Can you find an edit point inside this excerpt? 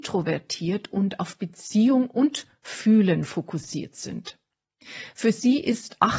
no; 0 cuts

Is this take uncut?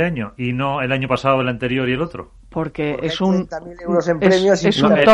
yes; 0 cuts

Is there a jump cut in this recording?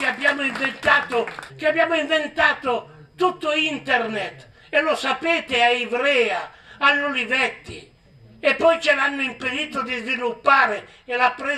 yes; 1 cut; at 1.5 s

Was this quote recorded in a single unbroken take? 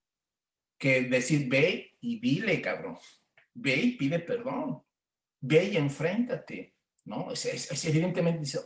no; 1 cut; at 6.9 s

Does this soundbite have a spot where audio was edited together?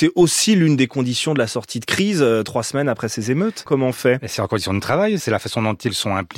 yes; 2 cuts; at 3.7 s, 5.2 s

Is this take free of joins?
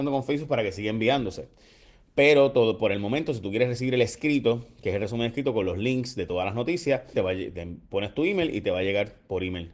no; 1 cut; at 7.1 s

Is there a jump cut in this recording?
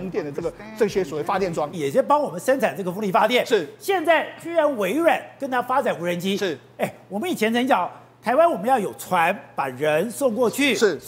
yes; 1 cut; at 1.7 s

